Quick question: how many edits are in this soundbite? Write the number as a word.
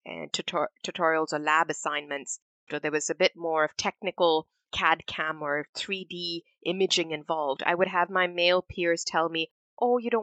one